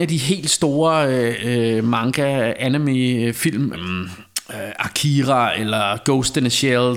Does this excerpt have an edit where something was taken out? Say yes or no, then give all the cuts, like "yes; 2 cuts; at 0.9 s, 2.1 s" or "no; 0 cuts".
yes; 1 cut; at 3.7 s